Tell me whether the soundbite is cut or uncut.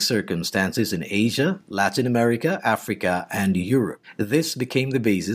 uncut